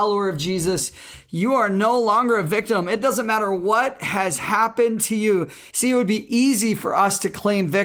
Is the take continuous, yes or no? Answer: no